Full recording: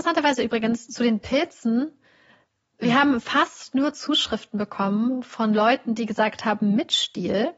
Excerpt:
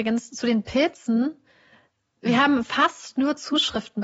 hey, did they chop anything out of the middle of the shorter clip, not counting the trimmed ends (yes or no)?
no